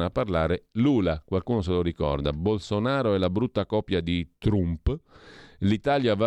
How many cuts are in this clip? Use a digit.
0